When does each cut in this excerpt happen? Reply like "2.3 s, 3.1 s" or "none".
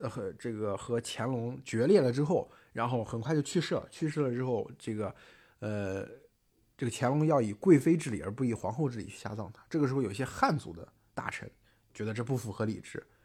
none